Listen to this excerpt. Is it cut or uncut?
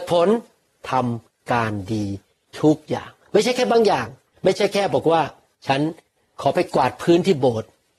uncut